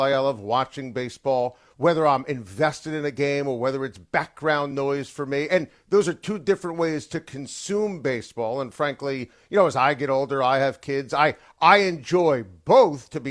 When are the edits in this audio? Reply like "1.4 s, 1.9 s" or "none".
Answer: none